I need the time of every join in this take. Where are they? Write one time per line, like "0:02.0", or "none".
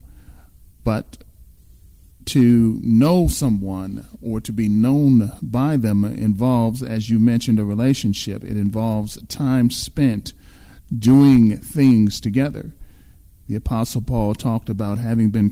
none